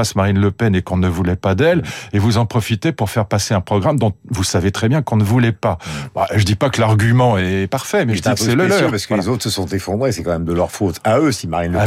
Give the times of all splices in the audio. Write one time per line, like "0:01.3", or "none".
none